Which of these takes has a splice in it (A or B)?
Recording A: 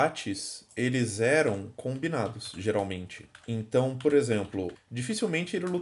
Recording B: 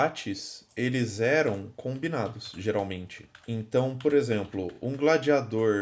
A